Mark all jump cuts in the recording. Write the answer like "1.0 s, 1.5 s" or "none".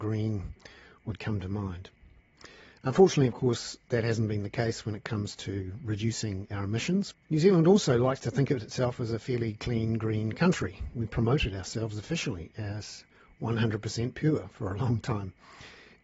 7.1 s